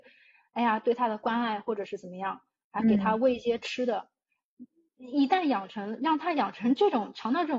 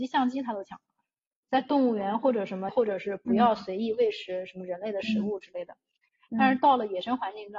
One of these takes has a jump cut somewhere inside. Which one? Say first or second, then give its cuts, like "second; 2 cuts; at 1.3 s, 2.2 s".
second; 2 cuts; at 1.4 s, 2.7 s